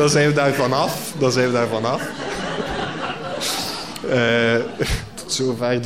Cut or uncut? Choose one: uncut